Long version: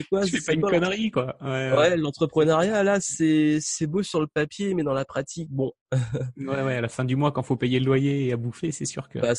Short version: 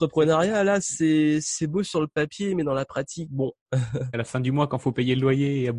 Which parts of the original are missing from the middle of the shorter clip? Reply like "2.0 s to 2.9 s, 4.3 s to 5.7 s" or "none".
6.3 s to 6.8 s